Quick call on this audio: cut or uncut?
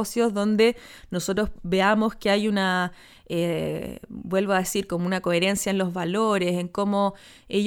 uncut